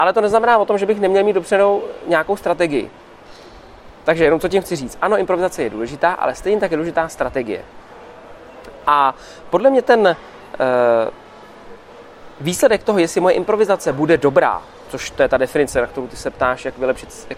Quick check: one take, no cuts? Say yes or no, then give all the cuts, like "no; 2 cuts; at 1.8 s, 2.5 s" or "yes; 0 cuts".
yes; 0 cuts